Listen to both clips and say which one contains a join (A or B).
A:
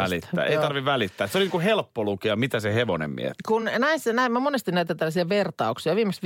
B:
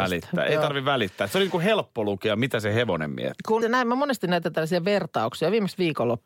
B